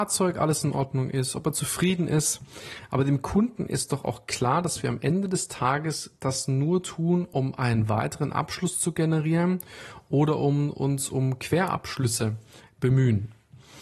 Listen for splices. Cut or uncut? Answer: uncut